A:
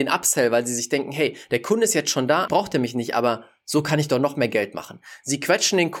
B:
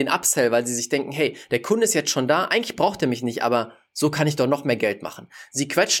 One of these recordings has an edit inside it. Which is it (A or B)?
A